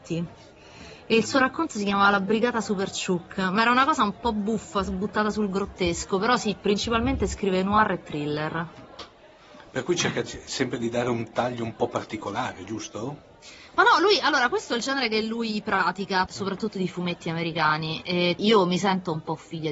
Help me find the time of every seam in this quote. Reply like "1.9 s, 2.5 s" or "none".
13.7 s, 16.3 s, 18.4 s